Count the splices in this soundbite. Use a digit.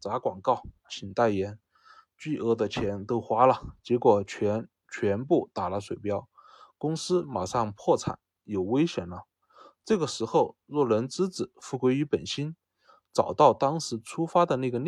0